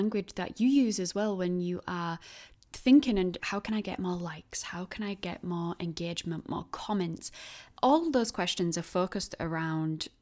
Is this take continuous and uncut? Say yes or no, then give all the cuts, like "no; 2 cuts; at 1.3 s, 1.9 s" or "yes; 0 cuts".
no; 1 cut; at 3.4 s